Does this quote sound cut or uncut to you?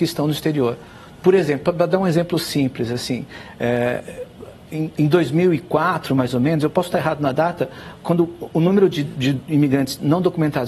uncut